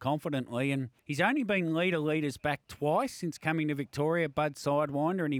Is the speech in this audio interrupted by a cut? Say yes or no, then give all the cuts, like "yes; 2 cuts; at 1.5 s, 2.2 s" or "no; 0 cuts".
yes; 1 cut; at 1.0 s